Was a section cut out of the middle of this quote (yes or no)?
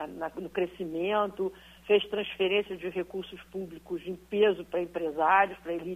no